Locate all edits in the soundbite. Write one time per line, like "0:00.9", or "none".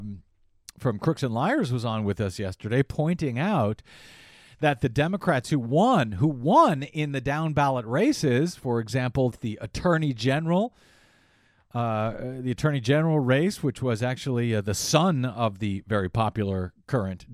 0:09.3